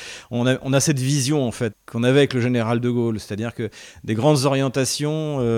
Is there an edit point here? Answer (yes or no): yes